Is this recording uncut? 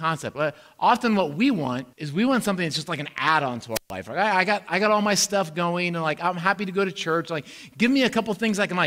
no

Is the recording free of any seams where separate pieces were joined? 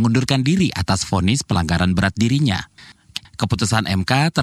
no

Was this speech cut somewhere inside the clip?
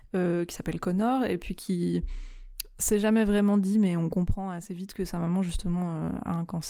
no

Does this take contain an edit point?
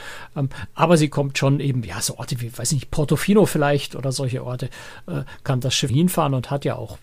yes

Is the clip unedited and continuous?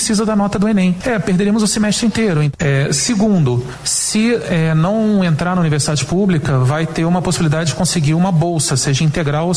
no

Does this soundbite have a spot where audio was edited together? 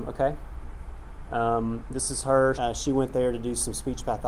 yes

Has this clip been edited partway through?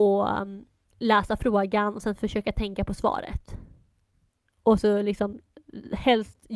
no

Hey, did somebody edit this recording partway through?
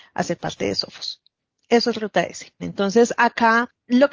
yes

